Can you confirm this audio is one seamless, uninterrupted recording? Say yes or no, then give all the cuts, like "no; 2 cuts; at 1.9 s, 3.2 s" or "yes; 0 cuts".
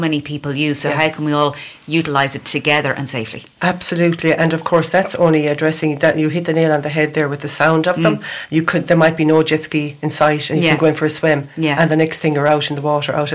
yes; 0 cuts